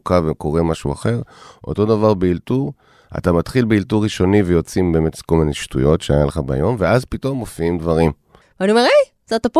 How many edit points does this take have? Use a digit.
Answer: 1